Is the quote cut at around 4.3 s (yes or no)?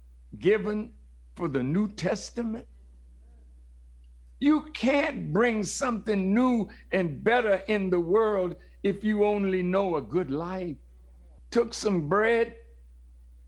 no